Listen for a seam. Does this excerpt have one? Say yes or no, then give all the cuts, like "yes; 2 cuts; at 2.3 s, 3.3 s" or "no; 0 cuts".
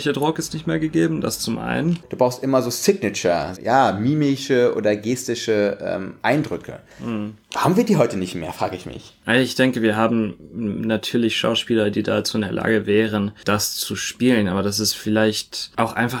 yes; 2 cuts; at 2.0 s, 3.6 s